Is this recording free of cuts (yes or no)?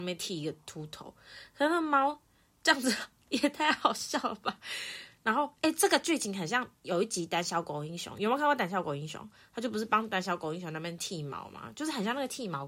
no